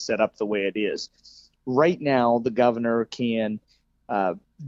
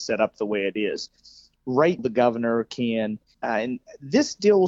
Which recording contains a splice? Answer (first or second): second